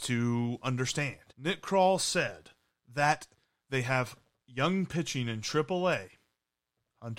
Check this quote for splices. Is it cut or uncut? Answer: cut